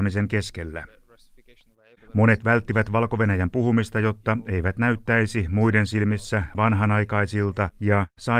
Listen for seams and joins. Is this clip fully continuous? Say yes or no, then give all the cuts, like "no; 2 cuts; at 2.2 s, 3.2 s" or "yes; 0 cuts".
no; 1 cut; at 2.0 s